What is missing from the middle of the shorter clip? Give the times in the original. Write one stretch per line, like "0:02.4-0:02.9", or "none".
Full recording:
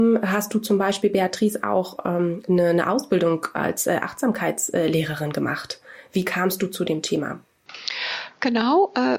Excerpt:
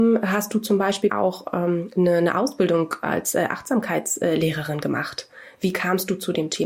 0:01.1-0:01.6